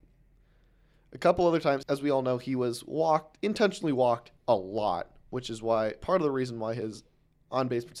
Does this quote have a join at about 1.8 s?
yes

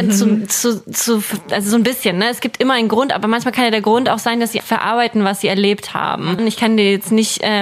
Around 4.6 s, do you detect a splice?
yes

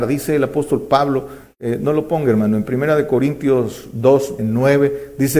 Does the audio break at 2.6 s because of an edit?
no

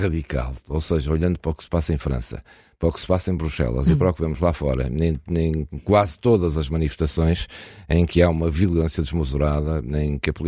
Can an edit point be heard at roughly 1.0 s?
no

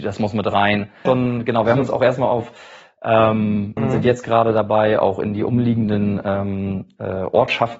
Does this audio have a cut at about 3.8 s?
yes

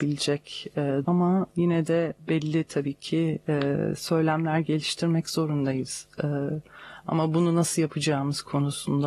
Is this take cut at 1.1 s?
yes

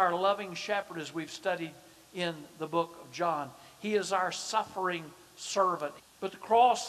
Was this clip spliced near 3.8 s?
no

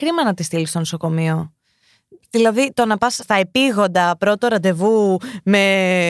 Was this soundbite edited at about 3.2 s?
yes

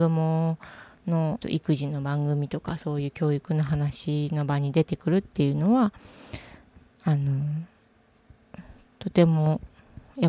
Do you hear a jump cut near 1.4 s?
yes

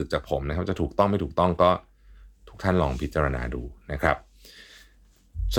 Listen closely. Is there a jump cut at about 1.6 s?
no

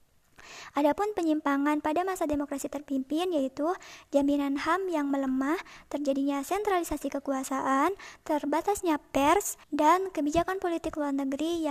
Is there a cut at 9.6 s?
yes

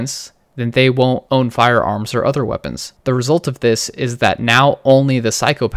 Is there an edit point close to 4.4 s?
no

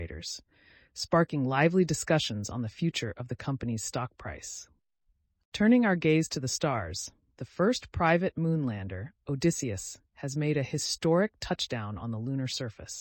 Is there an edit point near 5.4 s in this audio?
no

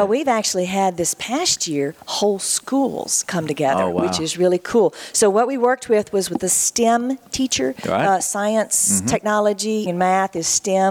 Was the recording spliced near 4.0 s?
no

